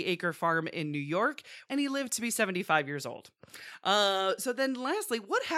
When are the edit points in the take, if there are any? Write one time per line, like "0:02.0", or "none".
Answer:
0:01.6